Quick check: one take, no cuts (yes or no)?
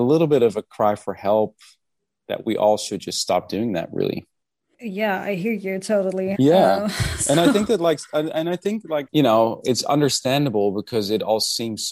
no